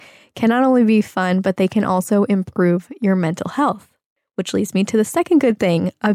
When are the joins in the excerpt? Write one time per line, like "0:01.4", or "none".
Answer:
none

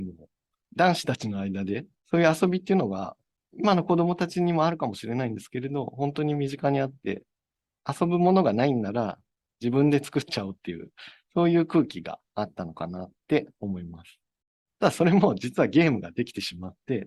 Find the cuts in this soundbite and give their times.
0:14.7

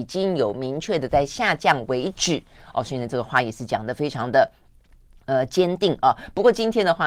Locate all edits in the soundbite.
none

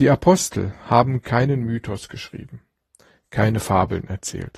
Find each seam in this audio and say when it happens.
0:03.2

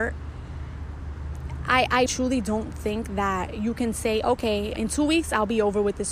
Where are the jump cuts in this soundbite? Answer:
0:02.1
0:04.8

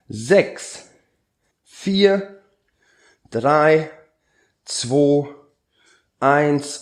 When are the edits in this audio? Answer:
0:01.5

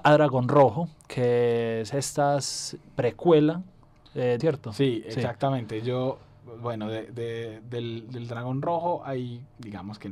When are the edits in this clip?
0:04.4

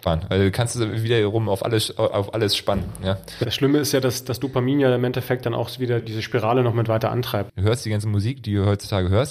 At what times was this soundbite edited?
0:06.0
0:07.5

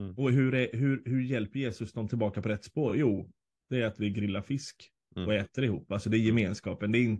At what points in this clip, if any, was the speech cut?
none

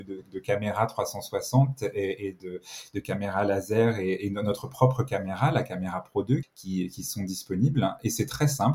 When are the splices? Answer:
0:06.4

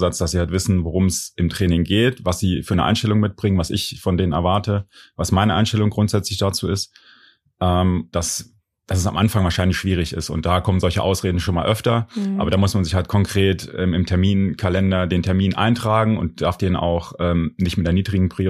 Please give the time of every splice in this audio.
0:08.1

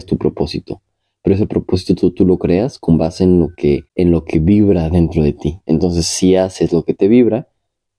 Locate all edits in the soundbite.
0:03.9

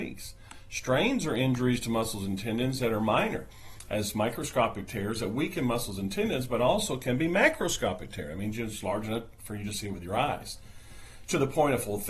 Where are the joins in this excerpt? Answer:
none

